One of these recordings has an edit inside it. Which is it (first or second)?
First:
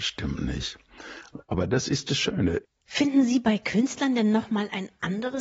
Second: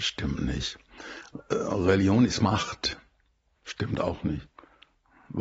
first